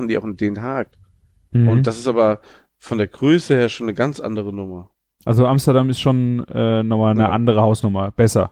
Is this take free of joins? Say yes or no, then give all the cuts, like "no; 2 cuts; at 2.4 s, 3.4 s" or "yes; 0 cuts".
yes; 0 cuts